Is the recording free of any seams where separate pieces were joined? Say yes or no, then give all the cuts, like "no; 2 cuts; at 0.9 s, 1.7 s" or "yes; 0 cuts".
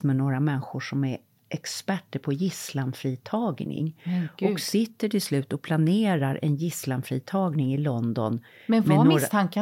yes; 0 cuts